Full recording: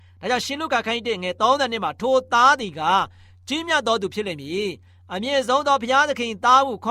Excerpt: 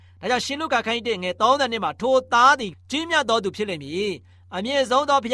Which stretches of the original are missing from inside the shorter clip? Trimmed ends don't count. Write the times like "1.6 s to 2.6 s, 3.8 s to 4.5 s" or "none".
2.7 s to 3.3 s